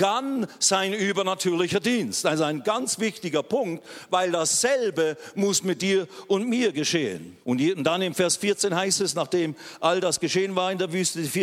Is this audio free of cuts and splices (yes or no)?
no